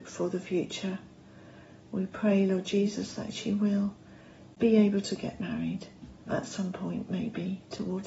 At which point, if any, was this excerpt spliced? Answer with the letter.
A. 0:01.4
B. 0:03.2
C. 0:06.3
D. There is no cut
C